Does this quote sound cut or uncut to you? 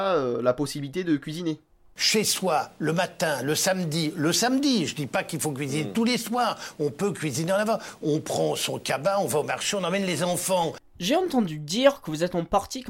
uncut